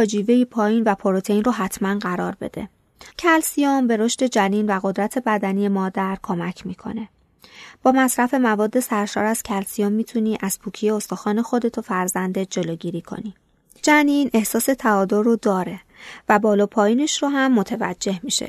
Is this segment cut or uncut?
cut